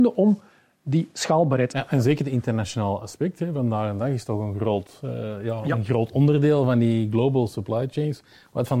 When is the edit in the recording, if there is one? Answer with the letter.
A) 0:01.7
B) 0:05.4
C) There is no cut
A